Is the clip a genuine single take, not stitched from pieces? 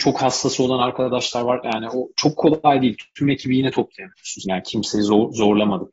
no; 2 cuts; at 1.6 s, 4.4 s

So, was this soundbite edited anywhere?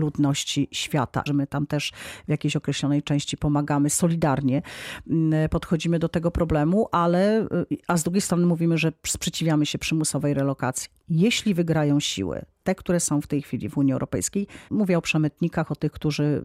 yes; 2 cuts; at 1.3 s, 14.7 s

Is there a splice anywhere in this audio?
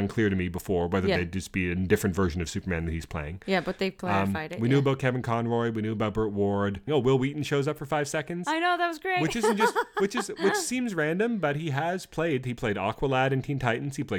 yes; 1 cut; at 6.9 s

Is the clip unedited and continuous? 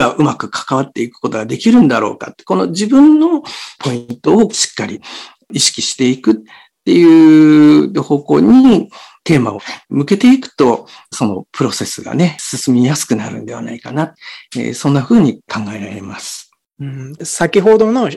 no; 1 cut; at 17.2 s

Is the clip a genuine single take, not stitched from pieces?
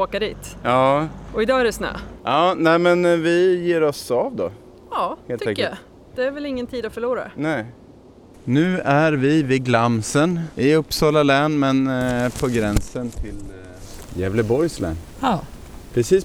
no; 1 cut; at 10.5 s

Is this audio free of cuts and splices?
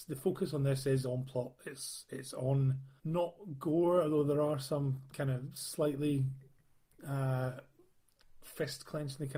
yes; 0 cuts

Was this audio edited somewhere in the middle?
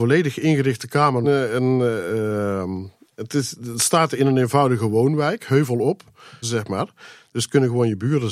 yes; 2 cuts; at 1.2 s, 6.4 s

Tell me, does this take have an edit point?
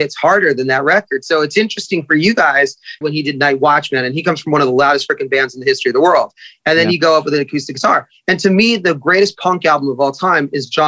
yes; 1 cut; at 3.0 s

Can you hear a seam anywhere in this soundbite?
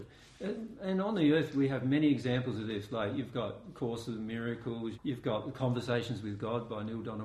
yes; 1 cut; at 4.9 s

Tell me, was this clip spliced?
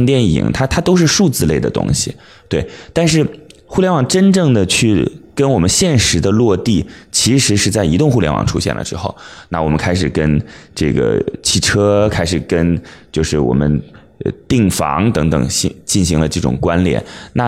no; 0 cuts

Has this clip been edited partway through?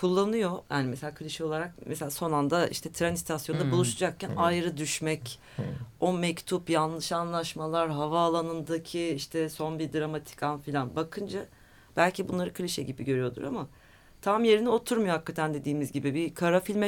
no; 0 cuts

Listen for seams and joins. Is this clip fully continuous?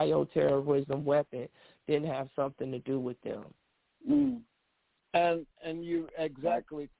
yes; 0 cuts

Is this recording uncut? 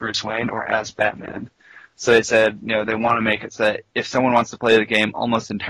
yes; 0 cuts

